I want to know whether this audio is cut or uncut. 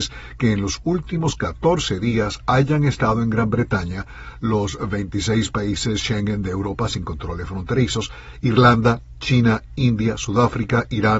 uncut